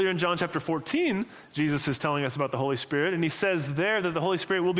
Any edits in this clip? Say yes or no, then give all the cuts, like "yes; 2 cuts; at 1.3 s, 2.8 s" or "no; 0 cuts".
no; 0 cuts